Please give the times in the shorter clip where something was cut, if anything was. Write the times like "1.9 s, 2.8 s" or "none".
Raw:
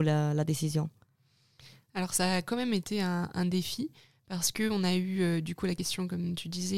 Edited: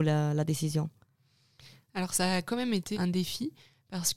2.9 s